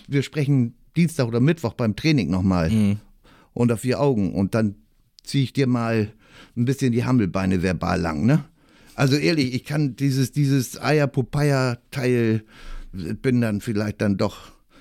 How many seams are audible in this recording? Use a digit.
1